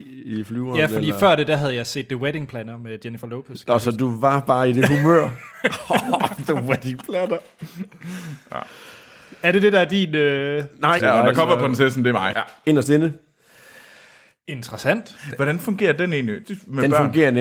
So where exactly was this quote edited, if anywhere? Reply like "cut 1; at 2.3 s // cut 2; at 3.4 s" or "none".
cut 1; at 11.0 s // cut 2; at 12.3 s // cut 3; at 16.4 s